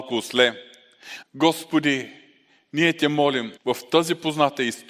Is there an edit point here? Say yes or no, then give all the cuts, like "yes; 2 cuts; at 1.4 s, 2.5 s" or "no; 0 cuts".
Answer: yes; 2 cuts; at 1.2 s, 3.6 s